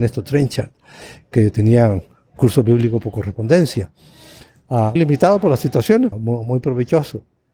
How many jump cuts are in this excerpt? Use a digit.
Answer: 2